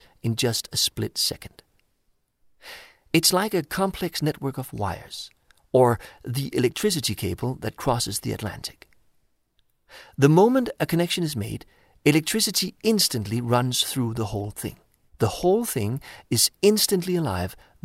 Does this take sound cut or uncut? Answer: cut